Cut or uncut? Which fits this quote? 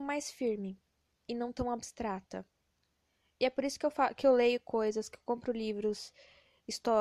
uncut